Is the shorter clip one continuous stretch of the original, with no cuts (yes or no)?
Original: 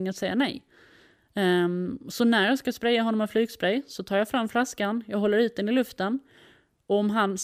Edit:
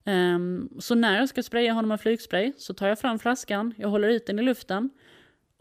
yes